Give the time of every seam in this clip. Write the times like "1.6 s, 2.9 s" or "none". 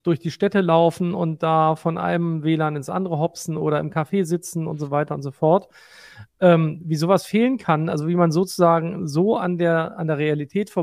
none